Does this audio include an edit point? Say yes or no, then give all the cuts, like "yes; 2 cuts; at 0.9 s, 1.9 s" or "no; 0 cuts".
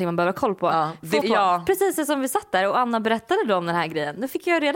yes; 1 cut; at 1.2 s